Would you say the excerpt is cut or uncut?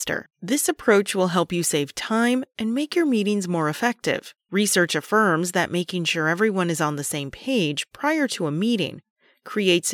uncut